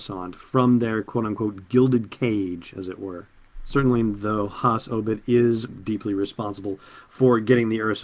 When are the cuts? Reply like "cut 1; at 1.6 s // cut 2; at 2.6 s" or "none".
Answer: cut 1; at 5.7 s

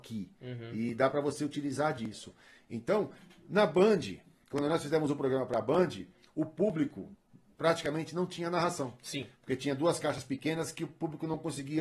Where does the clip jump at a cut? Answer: none

